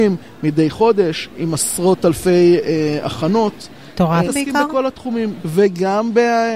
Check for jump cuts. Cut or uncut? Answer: cut